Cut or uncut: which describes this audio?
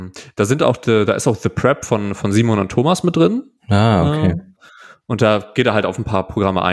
uncut